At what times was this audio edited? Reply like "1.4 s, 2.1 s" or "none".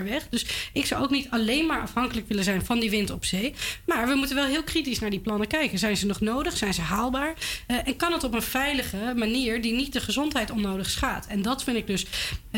none